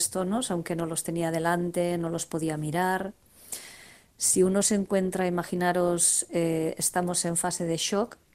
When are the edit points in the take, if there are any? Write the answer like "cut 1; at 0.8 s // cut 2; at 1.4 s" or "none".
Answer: none